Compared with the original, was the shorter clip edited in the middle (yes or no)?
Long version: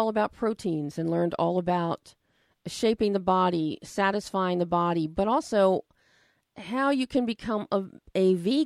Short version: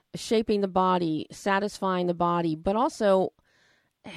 no